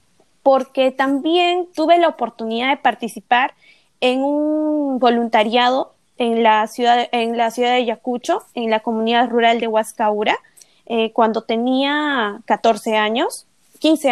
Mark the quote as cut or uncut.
uncut